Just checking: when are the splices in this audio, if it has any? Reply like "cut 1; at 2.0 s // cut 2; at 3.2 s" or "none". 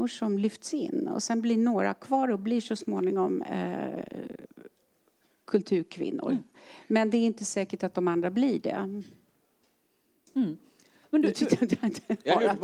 none